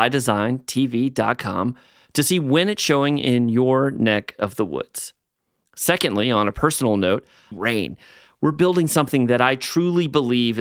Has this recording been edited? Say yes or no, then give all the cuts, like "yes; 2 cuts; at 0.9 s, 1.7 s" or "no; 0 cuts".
yes; 1 cut; at 7.5 s